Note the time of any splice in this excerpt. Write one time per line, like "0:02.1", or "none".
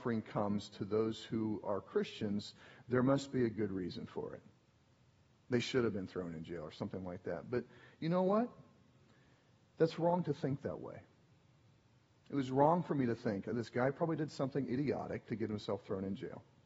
none